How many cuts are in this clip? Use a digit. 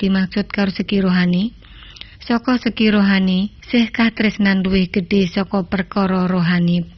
2